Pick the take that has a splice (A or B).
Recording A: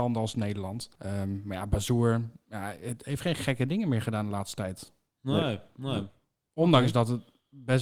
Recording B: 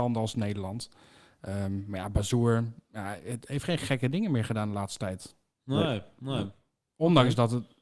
A